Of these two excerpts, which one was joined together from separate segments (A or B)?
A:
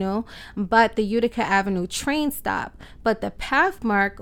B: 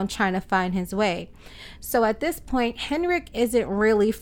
B